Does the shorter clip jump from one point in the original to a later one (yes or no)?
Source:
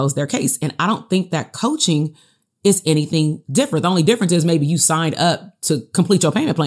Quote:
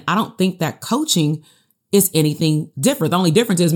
no